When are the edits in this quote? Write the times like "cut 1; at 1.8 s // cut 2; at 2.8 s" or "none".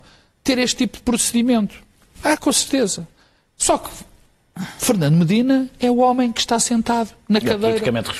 none